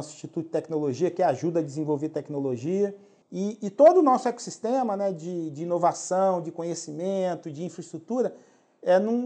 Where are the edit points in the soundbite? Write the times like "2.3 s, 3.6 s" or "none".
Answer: 3.2 s